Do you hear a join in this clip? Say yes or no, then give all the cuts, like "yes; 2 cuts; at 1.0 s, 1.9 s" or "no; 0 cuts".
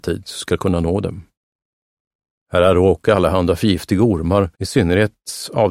yes; 1 cut; at 4.5 s